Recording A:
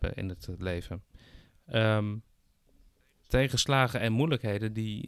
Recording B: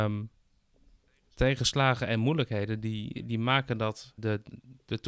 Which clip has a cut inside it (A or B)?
B